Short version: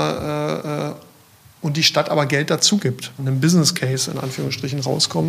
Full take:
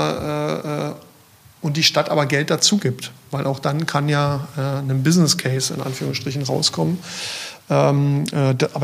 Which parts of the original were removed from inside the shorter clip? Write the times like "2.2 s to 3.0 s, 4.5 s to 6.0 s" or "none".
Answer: 3.2 s to 4.8 s